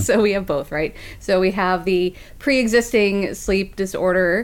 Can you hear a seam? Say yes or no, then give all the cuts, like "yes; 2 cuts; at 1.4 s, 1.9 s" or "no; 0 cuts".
no; 0 cuts